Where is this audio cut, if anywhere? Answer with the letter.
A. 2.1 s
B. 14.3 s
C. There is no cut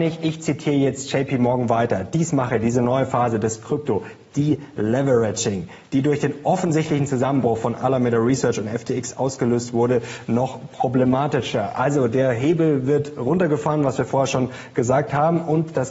C